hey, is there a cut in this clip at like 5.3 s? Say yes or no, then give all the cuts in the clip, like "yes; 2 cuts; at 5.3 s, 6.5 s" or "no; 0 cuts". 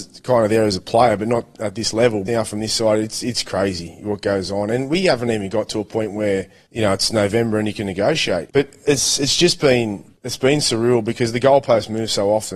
no; 2 cuts; at 2.3 s, 8.5 s